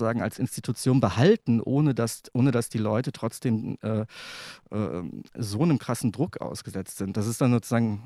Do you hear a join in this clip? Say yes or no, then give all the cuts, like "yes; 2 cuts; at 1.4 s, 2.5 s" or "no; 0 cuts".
no; 0 cuts